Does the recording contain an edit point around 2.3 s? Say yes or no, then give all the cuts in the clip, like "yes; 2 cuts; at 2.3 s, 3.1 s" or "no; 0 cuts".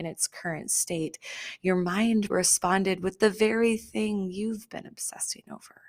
yes; 1 cut; at 2.3 s